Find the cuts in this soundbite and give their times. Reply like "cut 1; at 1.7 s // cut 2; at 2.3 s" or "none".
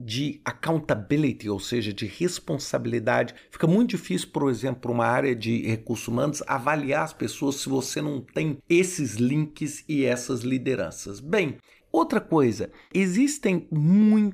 none